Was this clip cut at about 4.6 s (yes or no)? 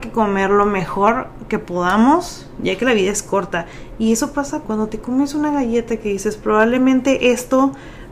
yes